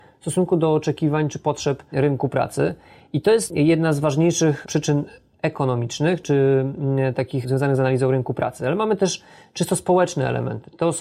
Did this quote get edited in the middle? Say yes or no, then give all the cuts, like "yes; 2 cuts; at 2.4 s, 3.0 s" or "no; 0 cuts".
no; 0 cuts